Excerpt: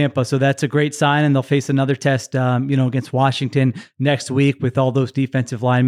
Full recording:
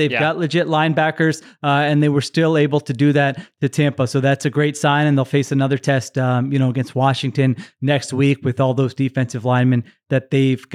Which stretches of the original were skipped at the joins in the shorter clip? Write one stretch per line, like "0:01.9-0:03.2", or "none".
none